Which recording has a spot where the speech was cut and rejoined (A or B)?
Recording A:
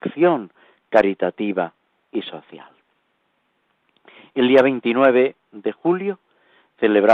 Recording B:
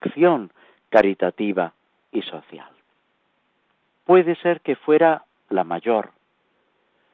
B